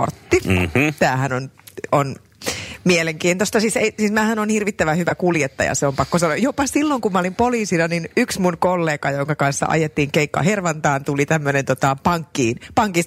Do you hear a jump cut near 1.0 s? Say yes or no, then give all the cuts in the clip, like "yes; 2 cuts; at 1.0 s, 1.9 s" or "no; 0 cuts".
no; 0 cuts